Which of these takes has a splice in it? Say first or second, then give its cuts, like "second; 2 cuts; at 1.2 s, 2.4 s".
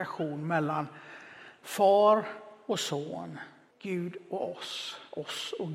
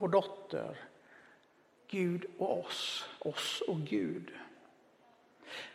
first; 1 cut; at 3.7 s